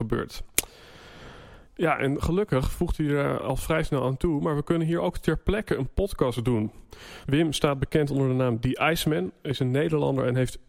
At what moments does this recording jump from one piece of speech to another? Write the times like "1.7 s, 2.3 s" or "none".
1.7 s, 7.2 s